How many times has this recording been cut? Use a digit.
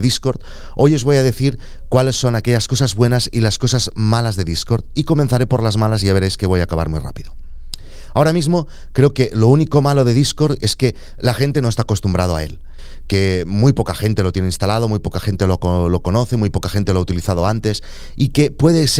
0